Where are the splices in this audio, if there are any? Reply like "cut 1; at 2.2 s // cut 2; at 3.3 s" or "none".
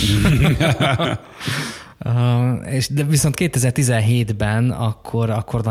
none